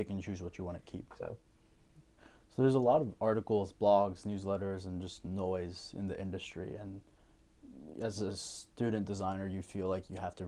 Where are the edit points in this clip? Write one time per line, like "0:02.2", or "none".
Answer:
0:01.1